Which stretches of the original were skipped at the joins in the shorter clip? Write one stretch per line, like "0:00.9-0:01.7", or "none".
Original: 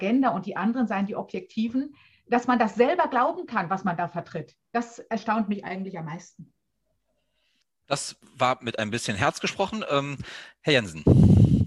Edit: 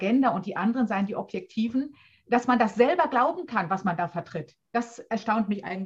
none